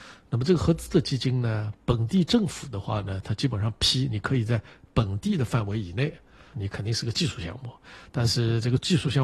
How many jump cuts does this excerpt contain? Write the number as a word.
one